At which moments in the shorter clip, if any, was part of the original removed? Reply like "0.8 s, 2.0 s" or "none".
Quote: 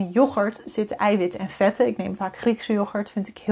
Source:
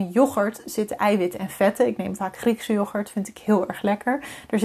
none